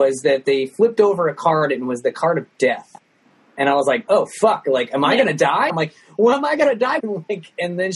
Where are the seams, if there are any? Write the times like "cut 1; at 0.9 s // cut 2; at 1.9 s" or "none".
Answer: cut 1; at 5.7 s // cut 2; at 7.0 s